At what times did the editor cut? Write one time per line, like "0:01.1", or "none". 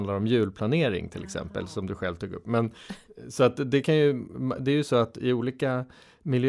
none